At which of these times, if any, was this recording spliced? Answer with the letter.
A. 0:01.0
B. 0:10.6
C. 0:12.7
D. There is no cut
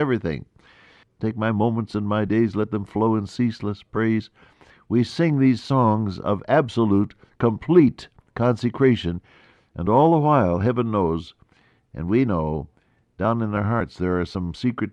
A